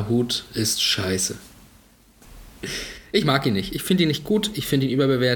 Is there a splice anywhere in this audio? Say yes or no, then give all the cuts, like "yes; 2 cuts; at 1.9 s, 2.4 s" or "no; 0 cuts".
yes; 1 cut; at 2.2 s